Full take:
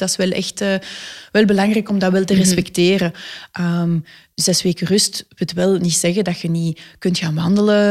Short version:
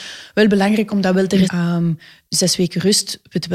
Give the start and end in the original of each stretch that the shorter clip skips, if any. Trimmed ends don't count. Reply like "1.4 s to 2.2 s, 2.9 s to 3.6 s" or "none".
2.4 s to 3.5 s